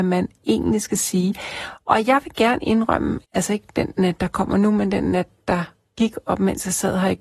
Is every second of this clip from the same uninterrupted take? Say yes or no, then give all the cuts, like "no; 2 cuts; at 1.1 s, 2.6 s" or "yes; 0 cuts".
no; 1 cut; at 3.2 s